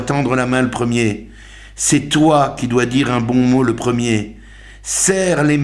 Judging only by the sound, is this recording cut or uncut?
uncut